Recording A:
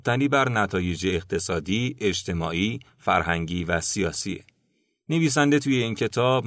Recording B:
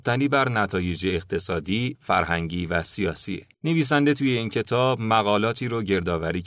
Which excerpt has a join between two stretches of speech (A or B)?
B